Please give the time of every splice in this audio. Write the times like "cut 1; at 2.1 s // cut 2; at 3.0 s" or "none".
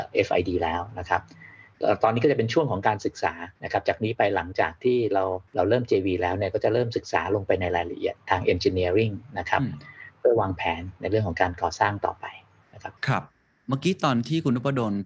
cut 1; at 3.6 s // cut 2; at 5.5 s // cut 3; at 13.0 s